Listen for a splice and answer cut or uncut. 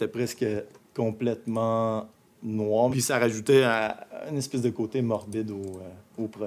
uncut